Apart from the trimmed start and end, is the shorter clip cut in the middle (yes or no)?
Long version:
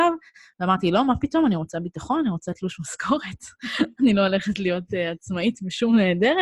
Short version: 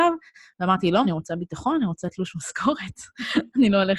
yes